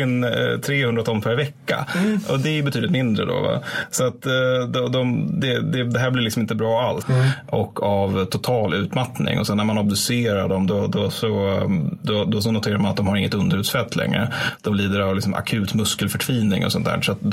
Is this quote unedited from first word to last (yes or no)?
no